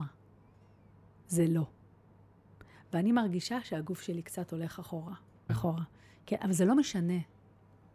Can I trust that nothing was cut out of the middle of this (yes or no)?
no